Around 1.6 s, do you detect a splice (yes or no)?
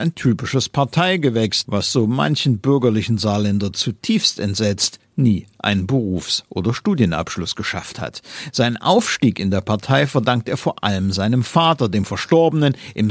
yes